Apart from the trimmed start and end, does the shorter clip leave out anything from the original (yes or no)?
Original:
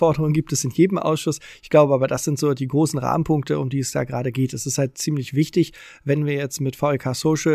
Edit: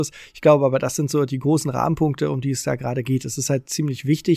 no